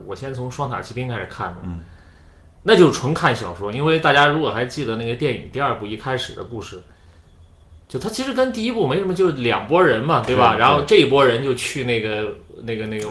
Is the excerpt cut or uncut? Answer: uncut